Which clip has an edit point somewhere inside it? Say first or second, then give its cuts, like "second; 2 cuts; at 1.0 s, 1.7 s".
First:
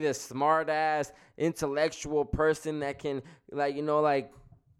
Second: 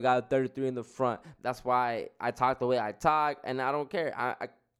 second; 1 cut; at 1.4 s